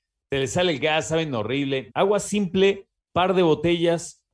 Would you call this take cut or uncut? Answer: cut